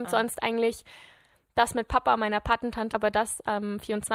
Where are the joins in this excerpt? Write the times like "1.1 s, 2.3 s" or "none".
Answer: 2.9 s

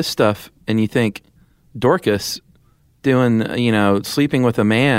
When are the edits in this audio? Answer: none

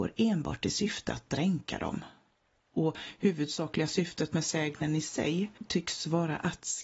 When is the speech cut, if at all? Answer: none

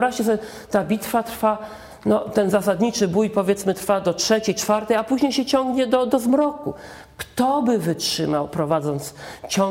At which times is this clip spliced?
none

